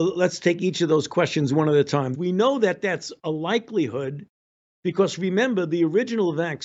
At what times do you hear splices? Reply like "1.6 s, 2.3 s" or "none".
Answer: 2.1 s